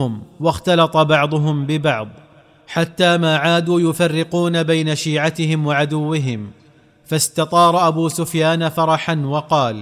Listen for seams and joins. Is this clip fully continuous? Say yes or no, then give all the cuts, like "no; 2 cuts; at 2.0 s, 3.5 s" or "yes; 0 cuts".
yes; 0 cuts